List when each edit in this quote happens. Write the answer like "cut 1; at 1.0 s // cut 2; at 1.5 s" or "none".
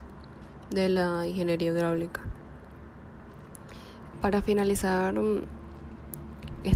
cut 1; at 4.1 s